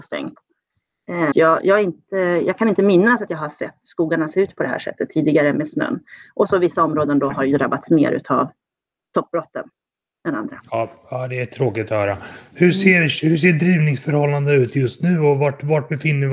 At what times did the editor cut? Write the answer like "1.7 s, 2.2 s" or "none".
1.3 s